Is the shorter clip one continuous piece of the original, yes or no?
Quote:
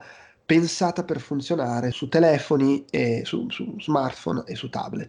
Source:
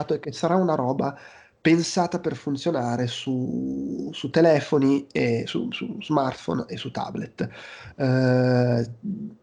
no